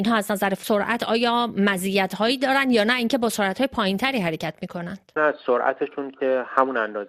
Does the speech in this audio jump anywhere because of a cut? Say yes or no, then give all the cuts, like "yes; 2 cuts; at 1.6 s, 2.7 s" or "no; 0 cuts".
yes; 1 cut; at 5.2 s